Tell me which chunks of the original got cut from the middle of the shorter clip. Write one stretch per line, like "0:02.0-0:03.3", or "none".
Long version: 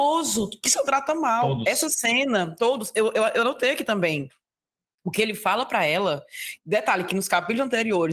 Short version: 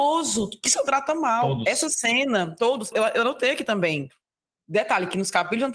0:02.9-0:03.1
0:04.8-0:06.6